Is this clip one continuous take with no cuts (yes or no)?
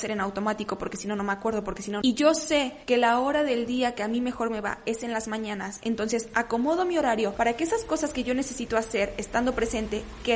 no